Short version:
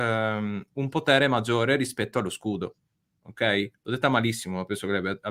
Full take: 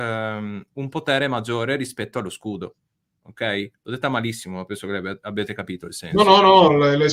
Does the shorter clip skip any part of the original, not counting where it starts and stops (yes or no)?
no